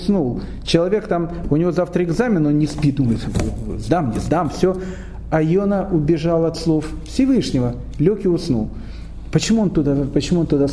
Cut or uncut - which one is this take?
uncut